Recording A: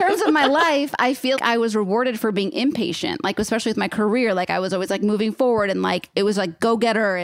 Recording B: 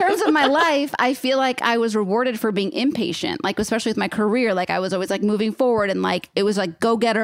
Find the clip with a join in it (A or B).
A